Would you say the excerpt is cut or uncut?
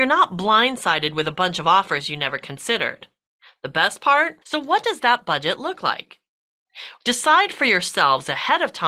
cut